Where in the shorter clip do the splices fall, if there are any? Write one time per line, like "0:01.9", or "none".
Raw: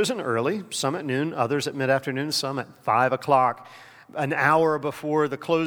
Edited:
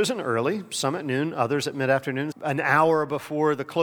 0:02.3